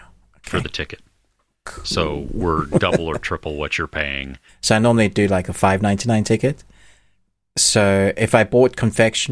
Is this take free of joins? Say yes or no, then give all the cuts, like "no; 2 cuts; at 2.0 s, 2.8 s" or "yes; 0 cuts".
no; 1 cut; at 4.5 s